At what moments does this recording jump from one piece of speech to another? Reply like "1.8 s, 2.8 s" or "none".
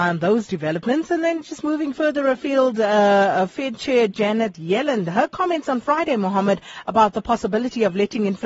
none